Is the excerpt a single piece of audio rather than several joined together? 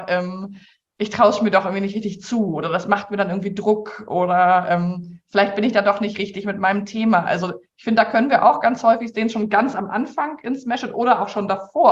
yes; 0 cuts

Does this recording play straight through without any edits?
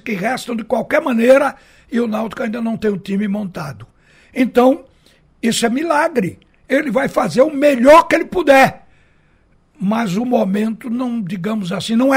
yes; 0 cuts

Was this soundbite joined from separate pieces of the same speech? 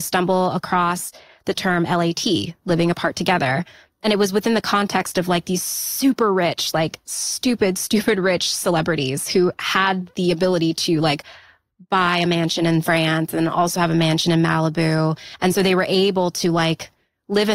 no; 0 cuts

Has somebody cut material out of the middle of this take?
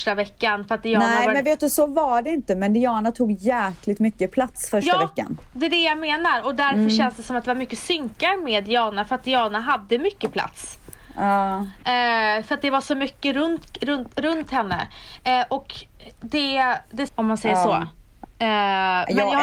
yes; 2 cuts; at 17.1 s, 18.2 s

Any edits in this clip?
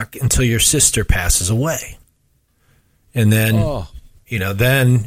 no; 0 cuts

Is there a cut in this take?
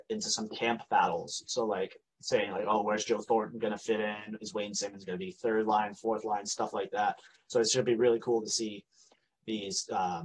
no; 0 cuts

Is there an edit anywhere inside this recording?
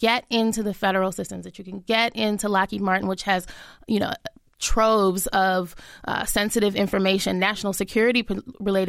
no; 0 cuts

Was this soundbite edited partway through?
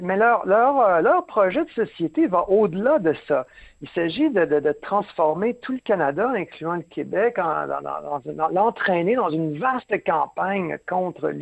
no; 0 cuts

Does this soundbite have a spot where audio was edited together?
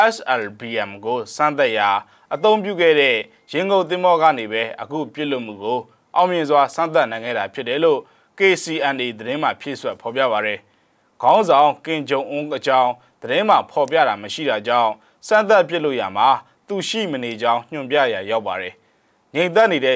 no; 0 cuts

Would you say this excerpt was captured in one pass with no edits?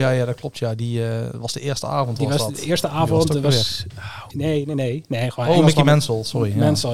no; 1 cut; at 4.3 s

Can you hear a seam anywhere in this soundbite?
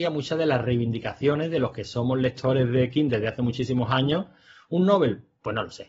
no; 0 cuts

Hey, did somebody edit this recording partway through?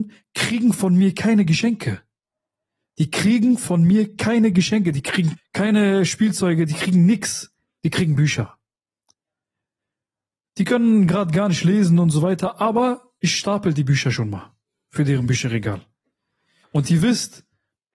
yes; 3 cuts; at 5.4 s, 7.8 s, 16.6 s

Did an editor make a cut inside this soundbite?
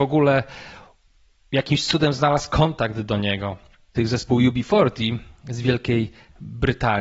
yes; 1 cut; at 4.0 s

